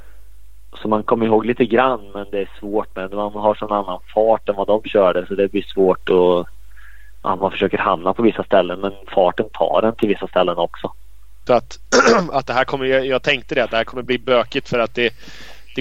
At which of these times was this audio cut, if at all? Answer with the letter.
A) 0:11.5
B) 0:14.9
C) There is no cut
A